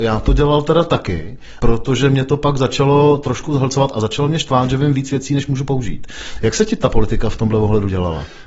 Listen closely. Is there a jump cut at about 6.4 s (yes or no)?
no